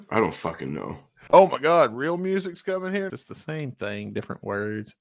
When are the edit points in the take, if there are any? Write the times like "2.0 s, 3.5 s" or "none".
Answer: 1.3 s, 3.1 s